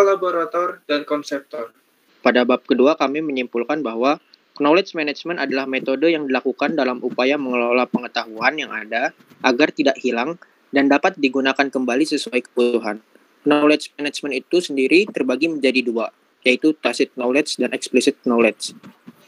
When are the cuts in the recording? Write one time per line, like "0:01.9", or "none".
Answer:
0:02.1